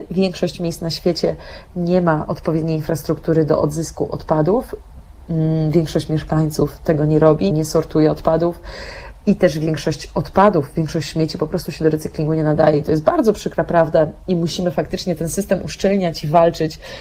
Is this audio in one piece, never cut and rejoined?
no; 1 cut; at 7.5 s

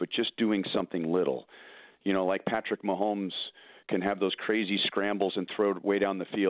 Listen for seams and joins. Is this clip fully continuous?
yes; 0 cuts

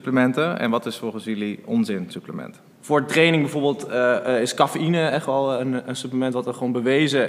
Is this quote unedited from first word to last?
no; 1 cut; at 2.7 s

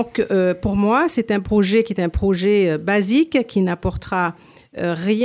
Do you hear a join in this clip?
no; 0 cuts

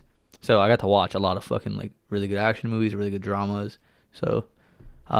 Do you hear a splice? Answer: yes; 1 cut; at 4.0 s

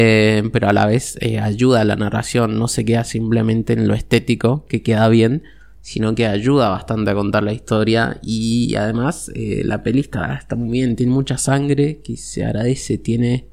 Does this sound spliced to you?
no; 0 cuts

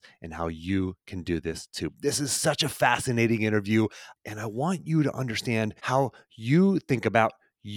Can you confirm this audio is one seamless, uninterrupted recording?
no; 2 cuts; at 4.1 s, 5.8 s

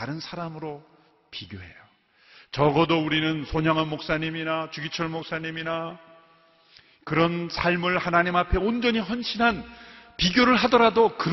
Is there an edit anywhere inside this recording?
no; 0 cuts

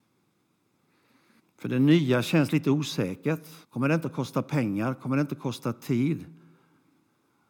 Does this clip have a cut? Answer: yes; 2 cuts; at 1.4 s, 3.6 s

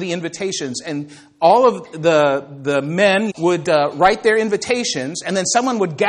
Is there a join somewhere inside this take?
yes; 1 cut; at 3.3 s

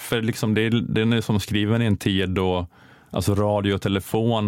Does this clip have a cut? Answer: no; 0 cuts

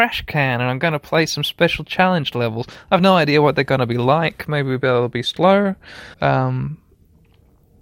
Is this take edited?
yes; 2 cuts; at 4.4 s, 6.1 s

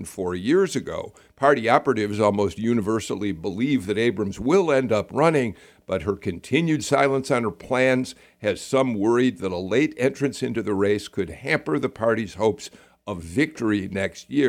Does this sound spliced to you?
no; 0 cuts

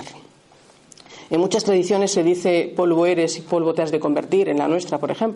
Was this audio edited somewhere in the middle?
no; 0 cuts

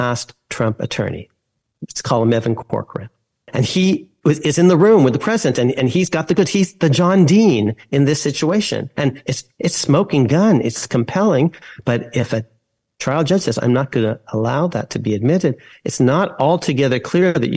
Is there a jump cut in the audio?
yes; 1 cut; at 8.9 s

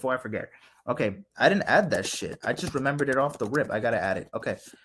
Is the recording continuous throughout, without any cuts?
yes; 0 cuts

